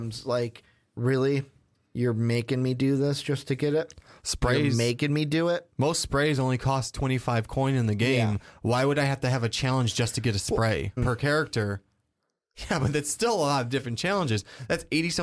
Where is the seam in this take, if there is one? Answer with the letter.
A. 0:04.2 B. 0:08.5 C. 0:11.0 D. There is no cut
C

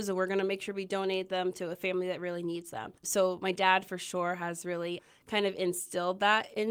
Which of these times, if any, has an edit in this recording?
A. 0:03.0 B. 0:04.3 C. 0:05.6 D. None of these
A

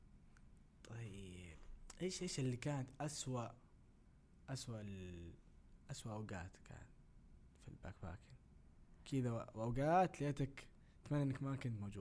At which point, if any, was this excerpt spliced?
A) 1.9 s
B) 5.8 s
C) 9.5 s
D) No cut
D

